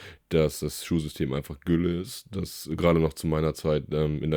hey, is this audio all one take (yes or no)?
yes